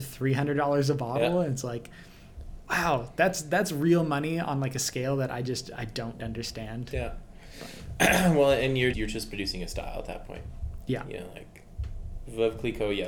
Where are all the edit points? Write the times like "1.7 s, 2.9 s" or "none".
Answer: 6.2 s, 8.9 s